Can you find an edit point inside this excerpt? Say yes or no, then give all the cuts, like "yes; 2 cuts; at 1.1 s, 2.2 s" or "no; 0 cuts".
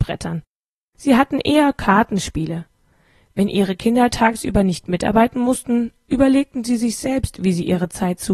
no; 0 cuts